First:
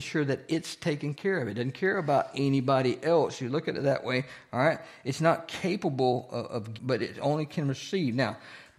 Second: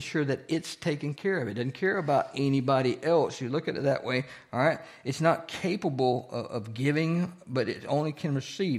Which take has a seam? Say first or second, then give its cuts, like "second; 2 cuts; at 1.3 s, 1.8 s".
first; 1 cut; at 6.8 s